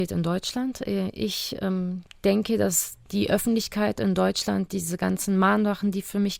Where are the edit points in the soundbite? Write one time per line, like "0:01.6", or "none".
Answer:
none